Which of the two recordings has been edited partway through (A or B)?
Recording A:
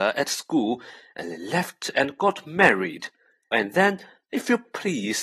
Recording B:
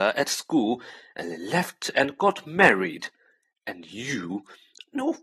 A